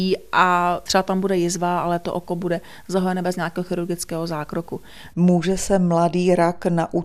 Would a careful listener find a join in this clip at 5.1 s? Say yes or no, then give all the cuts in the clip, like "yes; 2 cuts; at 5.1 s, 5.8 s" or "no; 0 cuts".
yes; 1 cut; at 5.1 s